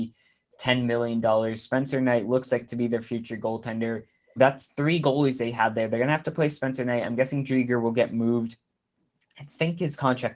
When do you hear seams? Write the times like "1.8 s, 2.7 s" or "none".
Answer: 4.4 s